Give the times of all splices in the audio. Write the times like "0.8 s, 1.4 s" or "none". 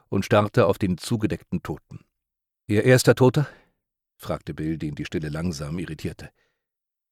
2.5 s